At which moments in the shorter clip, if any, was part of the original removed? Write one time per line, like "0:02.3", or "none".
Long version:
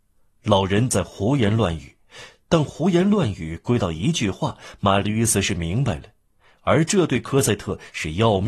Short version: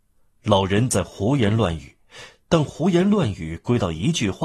none